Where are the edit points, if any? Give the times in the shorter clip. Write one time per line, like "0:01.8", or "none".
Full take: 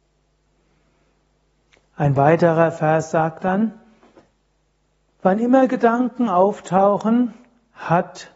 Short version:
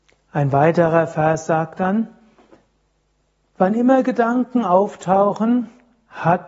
none